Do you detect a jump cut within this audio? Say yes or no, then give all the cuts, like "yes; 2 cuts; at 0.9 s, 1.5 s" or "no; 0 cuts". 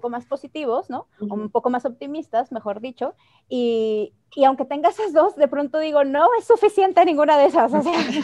no; 0 cuts